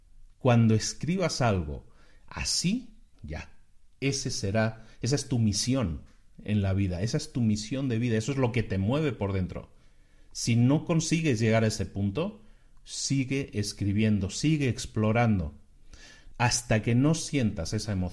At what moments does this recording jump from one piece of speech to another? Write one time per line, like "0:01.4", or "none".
0:03.1
0:16.3